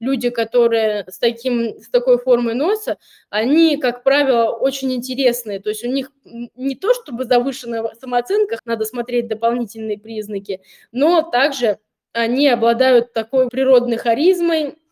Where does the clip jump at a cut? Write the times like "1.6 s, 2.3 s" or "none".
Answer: 8.6 s, 13.5 s